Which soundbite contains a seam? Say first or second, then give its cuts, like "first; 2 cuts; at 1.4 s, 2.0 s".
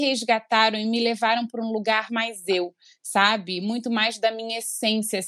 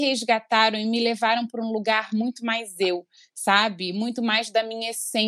first; 1 cut; at 2.1 s